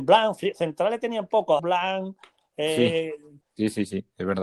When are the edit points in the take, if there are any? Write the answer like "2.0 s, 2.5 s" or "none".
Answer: 1.6 s, 3.4 s